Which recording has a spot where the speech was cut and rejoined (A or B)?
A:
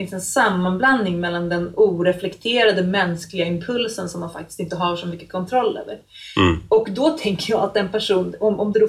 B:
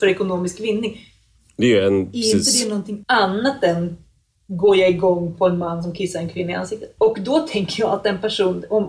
B